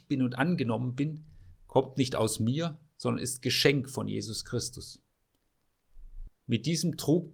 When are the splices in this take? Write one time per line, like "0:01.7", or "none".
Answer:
0:06.3